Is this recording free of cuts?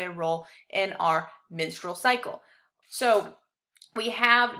no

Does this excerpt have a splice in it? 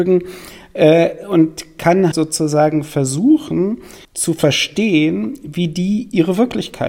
yes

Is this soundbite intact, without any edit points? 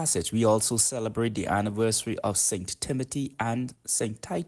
yes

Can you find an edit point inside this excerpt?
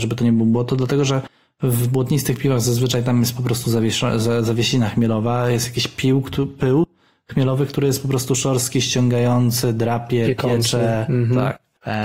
no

